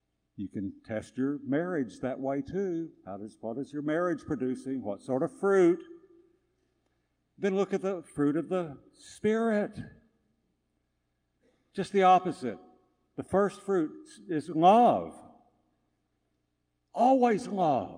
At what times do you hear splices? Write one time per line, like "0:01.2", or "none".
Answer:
none